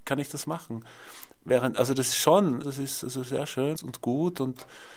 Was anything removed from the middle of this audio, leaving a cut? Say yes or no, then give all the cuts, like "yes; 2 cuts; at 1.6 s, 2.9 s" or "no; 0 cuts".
yes; 2 cuts; at 2.6 s, 3.7 s